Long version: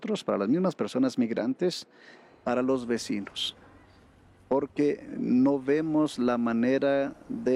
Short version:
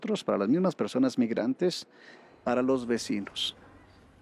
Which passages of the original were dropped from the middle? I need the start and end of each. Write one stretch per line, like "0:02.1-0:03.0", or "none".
none